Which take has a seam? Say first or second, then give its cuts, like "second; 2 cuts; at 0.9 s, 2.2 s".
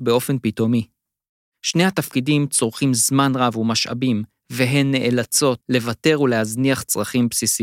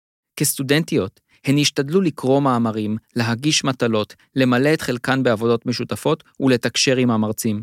first; 2 cuts; at 1.5 s, 5.6 s